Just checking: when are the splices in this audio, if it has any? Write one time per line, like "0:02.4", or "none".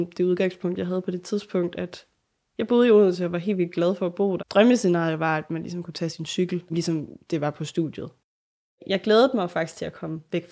0:04.4
0:06.7